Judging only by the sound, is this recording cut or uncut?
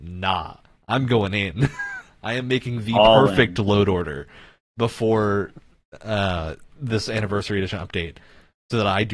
uncut